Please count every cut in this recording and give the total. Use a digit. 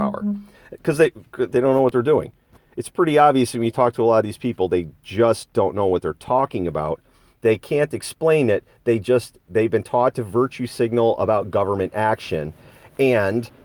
1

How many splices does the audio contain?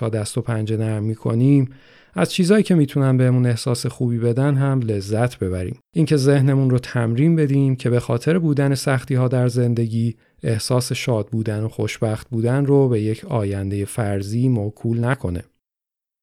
1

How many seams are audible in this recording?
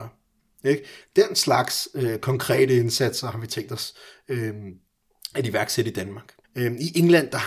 2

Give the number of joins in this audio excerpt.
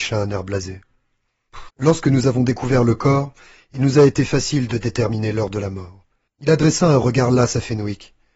2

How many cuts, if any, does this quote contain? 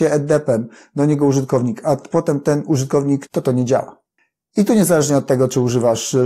1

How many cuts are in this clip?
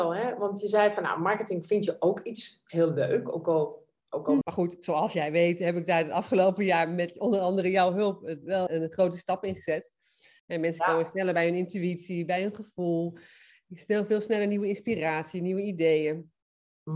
3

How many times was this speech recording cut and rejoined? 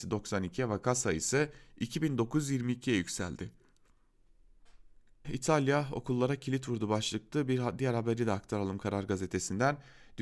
1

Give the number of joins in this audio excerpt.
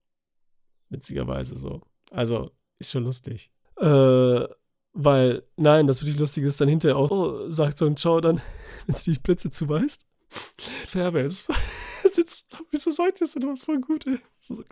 3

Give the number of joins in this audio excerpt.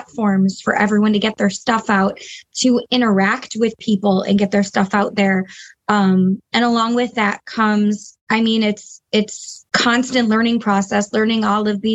2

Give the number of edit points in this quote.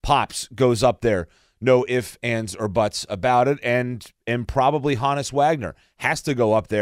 0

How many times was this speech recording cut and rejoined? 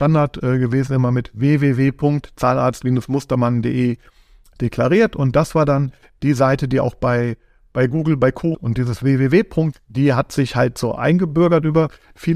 2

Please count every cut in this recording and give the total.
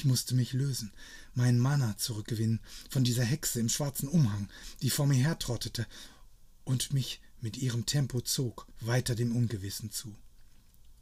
1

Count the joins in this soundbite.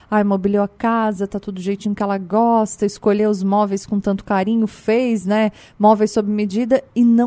0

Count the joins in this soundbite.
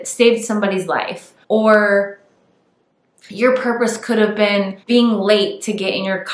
2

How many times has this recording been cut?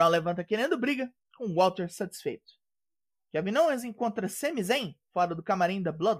1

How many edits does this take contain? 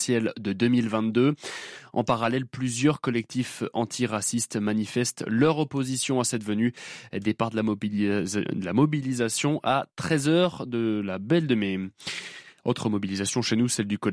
0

